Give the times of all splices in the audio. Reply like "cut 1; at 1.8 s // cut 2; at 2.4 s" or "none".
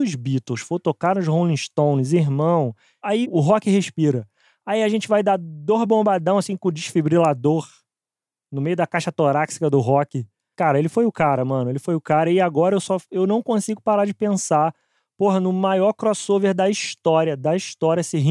cut 1; at 3.2 s // cut 2; at 10.5 s

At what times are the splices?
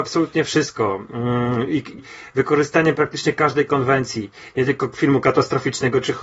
cut 1; at 2.0 s

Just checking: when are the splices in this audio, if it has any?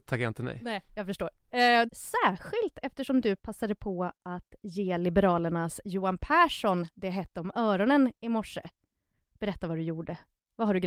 cut 1; at 1.9 s

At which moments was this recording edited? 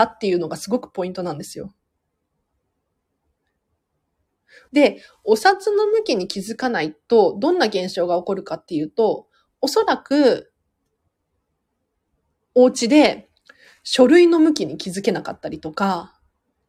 cut 1; at 4.7 s

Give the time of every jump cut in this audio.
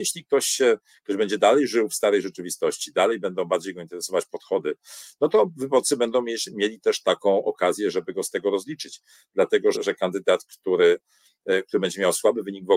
cut 1; at 9.7 s

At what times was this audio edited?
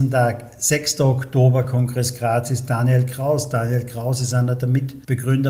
none

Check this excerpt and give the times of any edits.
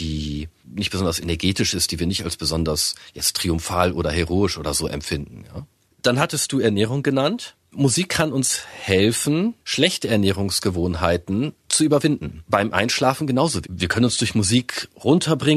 cut 1; at 9.6 s // cut 2; at 12.4 s // cut 3; at 13.6 s

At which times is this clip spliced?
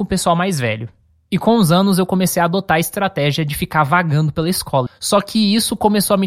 cut 1; at 4.9 s

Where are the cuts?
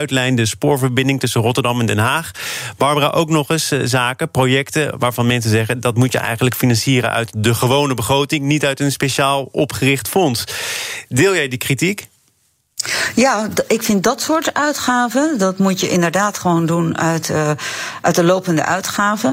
none

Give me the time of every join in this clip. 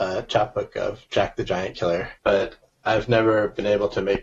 cut 1; at 2.2 s

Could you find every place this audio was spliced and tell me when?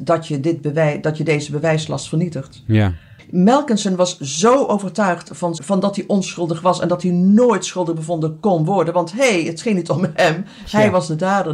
cut 1; at 3.2 s // cut 2; at 5.6 s

